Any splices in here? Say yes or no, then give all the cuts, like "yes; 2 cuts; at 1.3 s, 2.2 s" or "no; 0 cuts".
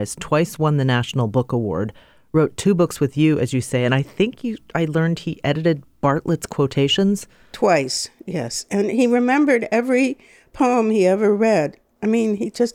no; 0 cuts